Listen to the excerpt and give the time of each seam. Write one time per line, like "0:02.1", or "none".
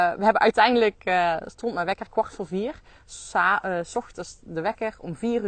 none